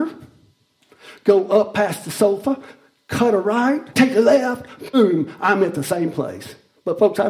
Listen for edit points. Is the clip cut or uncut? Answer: cut